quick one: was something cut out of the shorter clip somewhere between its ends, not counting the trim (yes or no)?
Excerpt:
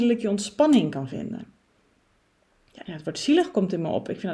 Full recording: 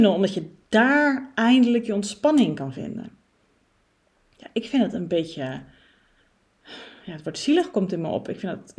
yes